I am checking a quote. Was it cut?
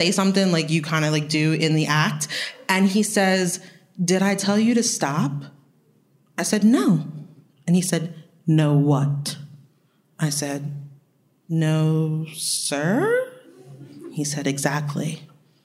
no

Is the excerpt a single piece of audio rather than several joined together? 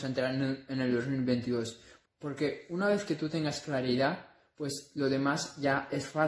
no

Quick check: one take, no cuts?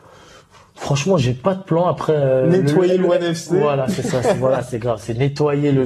yes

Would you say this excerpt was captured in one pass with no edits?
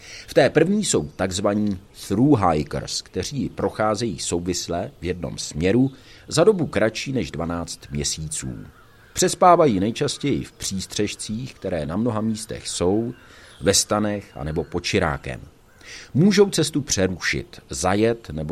yes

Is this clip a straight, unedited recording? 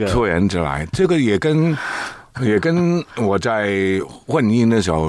yes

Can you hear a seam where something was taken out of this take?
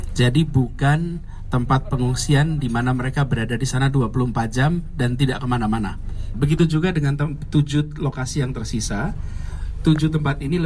yes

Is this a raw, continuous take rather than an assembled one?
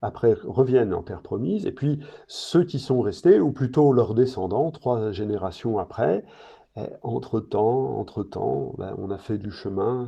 yes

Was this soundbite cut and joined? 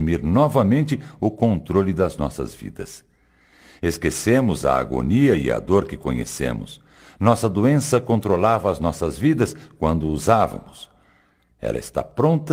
no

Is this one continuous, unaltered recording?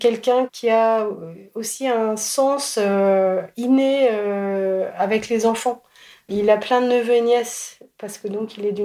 yes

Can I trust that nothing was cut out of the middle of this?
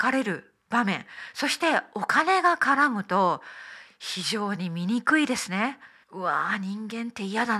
no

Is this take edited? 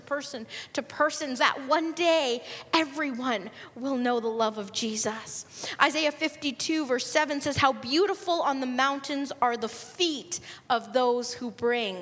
yes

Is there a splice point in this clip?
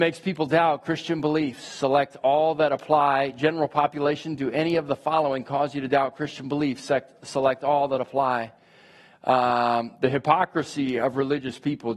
yes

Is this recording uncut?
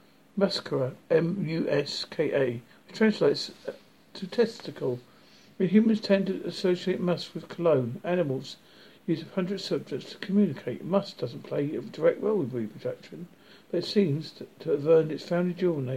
no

